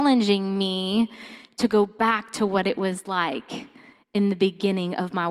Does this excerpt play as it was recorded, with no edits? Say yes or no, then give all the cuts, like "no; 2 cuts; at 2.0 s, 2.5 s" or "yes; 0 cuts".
yes; 0 cuts